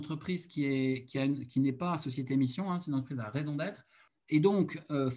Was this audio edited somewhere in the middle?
yes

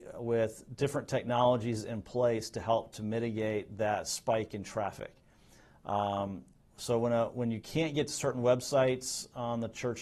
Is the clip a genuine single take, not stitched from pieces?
yes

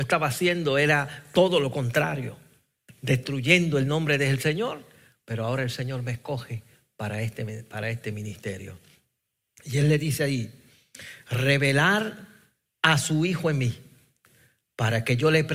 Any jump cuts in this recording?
no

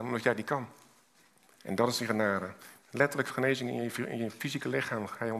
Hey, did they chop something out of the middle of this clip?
yes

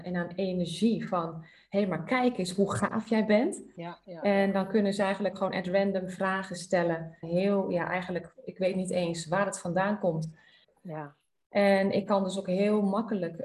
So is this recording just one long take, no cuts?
no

